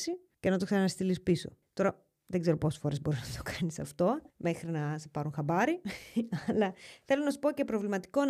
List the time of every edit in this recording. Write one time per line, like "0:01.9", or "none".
0:04.3